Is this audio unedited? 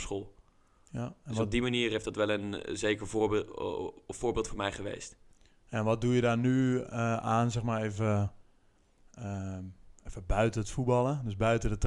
yes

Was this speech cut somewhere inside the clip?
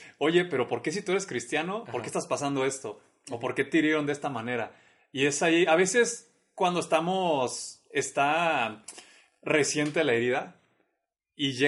no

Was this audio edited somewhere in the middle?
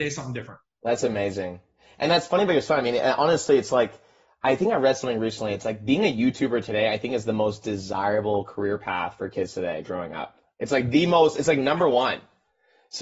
no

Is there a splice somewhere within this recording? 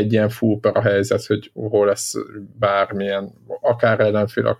no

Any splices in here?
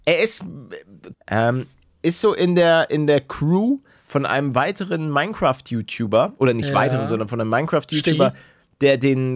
yes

